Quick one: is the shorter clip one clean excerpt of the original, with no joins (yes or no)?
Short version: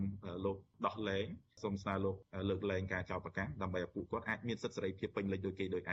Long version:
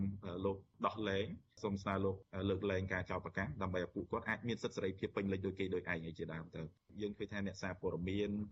yes